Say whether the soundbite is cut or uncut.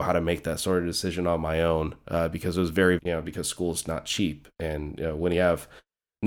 cut